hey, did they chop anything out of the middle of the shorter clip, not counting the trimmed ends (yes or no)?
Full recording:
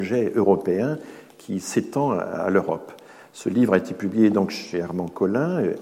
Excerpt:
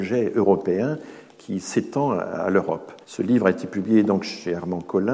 yes